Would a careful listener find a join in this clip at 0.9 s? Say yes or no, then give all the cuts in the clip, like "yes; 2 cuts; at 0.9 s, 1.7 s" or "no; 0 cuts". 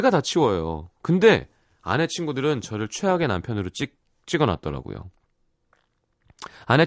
no; 0 cuts